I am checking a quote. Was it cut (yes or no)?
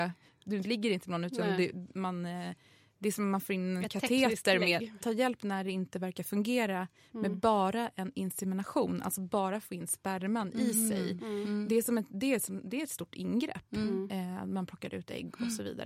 yes